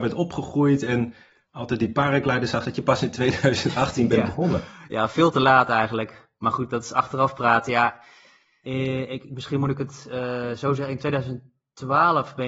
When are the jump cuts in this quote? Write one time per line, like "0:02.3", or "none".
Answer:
none